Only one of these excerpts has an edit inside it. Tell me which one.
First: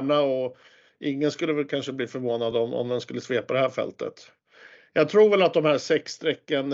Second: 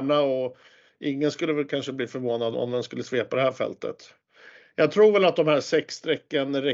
second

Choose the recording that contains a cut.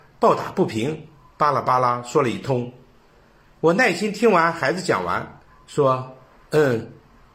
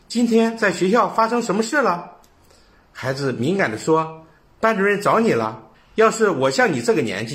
second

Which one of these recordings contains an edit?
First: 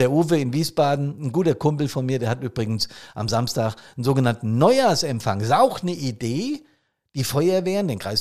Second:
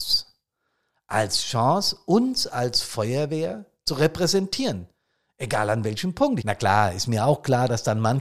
second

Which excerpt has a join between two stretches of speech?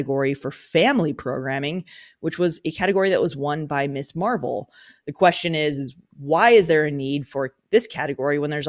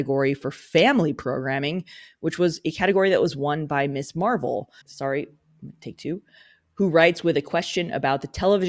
second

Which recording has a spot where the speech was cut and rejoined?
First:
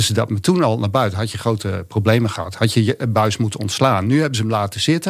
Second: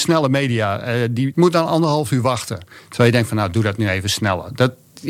second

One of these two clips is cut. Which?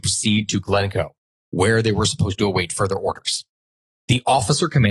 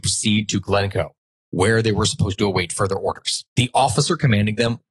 second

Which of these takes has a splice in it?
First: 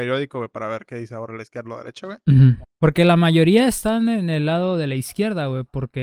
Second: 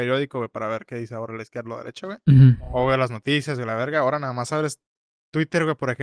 first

